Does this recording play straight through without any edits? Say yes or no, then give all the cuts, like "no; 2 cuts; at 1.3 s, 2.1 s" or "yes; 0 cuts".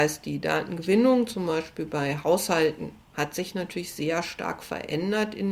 yes; 0 cuts